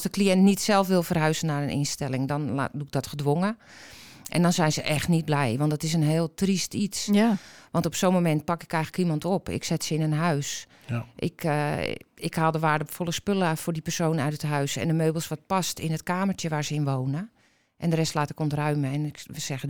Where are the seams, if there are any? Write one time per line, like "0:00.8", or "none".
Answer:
none